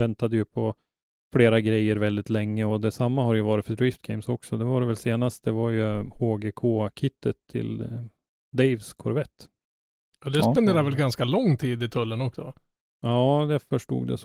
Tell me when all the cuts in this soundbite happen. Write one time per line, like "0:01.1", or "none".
none